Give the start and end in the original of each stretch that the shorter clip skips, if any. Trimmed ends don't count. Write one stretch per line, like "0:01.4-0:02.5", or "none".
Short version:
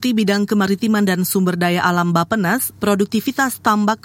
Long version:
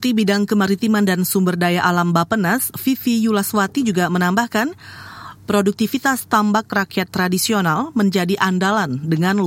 0:02.7-0:05.4